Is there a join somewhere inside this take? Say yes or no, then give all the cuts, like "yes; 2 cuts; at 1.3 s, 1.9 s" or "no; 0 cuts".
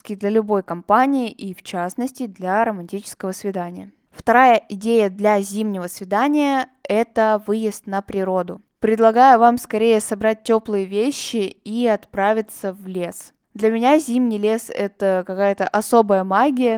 yes; 1 cut; at 8.7 s